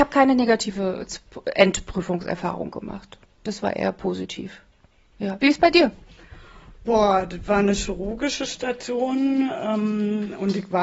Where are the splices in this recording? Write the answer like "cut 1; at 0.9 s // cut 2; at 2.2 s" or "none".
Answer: none